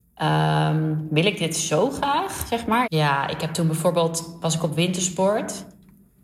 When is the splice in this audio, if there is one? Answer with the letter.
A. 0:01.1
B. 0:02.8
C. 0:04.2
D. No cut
B